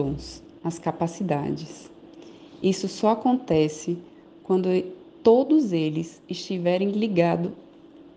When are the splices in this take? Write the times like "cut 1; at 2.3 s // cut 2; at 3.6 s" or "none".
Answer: none